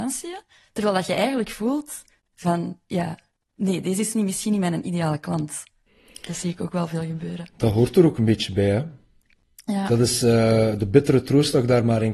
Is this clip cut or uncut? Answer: uncut